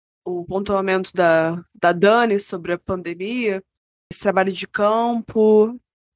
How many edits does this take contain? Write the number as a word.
one